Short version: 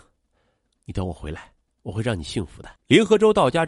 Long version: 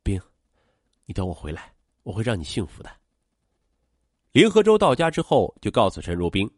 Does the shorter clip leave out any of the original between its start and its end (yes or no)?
yes